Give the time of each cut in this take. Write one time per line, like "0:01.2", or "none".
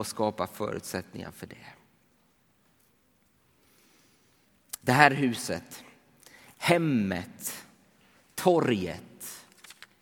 0:06.5